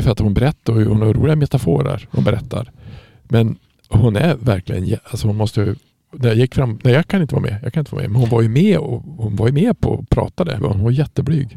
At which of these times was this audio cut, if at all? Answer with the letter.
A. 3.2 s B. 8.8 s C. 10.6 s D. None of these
C